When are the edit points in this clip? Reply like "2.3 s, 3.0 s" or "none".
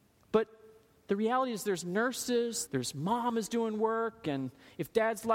2.7 s